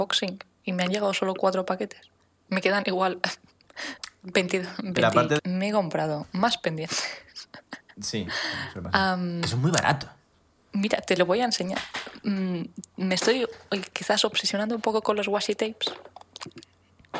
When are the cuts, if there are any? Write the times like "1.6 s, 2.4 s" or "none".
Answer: 5.4 s